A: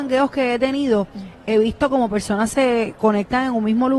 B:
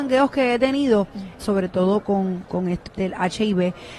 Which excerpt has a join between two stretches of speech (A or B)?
B